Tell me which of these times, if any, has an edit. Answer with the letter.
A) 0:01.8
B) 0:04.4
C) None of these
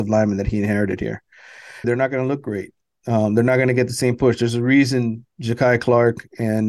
A